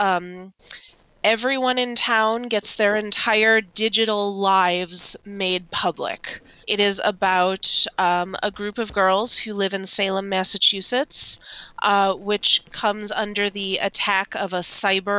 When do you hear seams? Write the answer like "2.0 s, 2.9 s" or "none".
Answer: 6.6 s